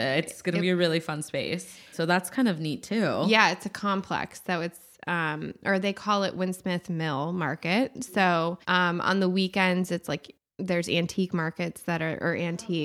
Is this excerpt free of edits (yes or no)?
no